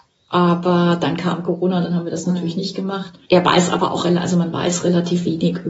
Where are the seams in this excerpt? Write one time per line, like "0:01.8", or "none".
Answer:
none